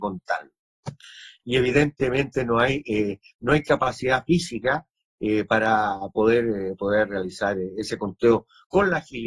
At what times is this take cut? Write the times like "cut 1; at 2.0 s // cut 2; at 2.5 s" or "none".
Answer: none

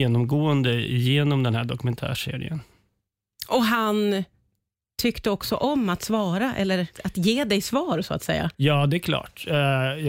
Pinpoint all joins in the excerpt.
cut 1; at 6.9 s // cut 2; at 8.5 s

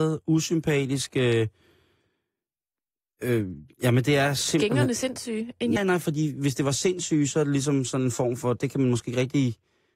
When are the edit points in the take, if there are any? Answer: cut 1; at 5.8 s

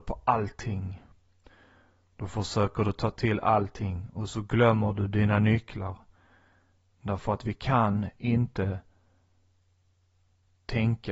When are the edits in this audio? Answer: cut 1; at 6.9 s

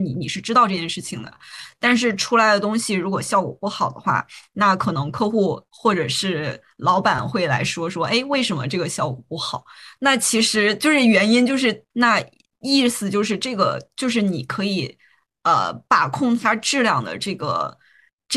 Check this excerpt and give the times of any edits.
cut 1; at 11.9 s

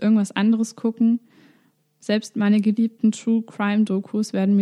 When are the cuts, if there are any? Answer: none

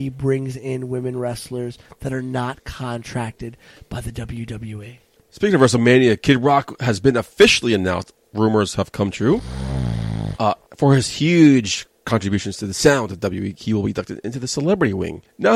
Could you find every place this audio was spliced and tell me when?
none

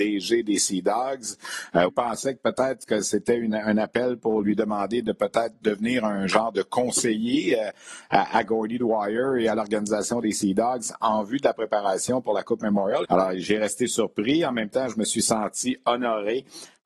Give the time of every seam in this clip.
cut 1; at 1.9 s // cut 2; at 13.0 s

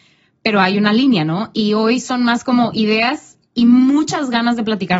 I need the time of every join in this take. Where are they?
none

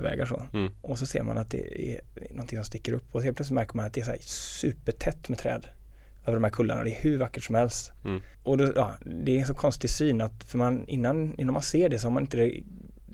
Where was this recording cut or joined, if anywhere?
cut 1; at 8.3 s

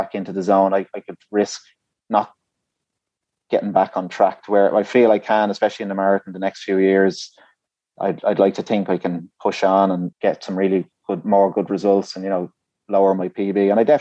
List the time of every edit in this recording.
cut 1; at 10.1 s

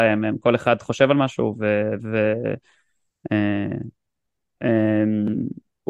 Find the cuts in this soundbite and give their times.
none

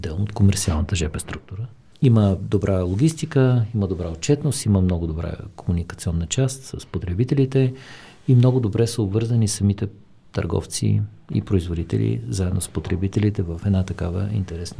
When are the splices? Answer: none

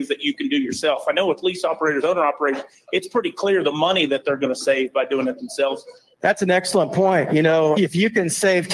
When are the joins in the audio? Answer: cut 1; at 6.1 s // cut 2; at 7.8 s

